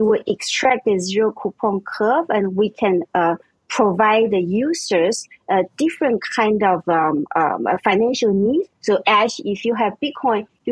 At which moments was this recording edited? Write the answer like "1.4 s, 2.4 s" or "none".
8.7 s